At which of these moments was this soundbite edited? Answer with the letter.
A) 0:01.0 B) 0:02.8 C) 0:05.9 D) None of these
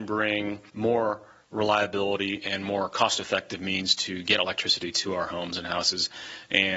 D